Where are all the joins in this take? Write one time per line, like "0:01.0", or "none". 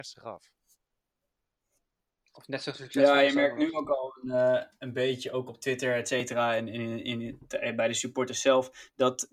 none